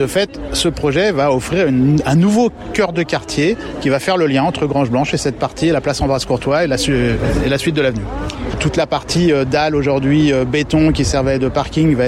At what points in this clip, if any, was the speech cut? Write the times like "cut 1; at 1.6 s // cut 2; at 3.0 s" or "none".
cut 1; at 8.5 s